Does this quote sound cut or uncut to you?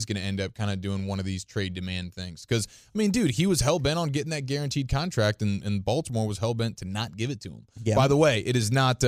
uncut